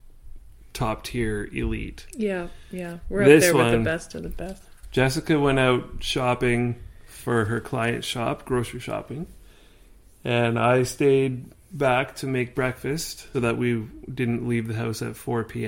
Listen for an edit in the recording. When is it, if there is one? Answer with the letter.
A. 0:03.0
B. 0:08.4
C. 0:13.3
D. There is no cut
C